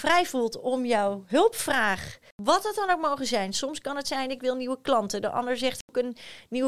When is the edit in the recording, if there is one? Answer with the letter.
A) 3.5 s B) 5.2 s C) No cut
C